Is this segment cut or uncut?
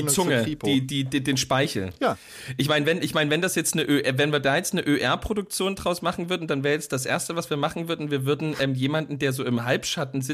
uncut